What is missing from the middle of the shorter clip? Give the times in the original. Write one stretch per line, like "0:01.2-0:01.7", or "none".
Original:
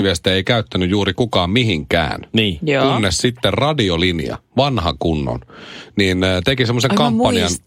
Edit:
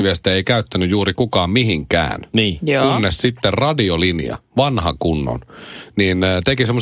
none